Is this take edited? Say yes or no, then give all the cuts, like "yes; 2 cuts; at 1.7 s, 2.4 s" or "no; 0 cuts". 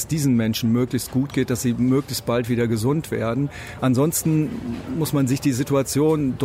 yes; 1 cut; at 3.8 s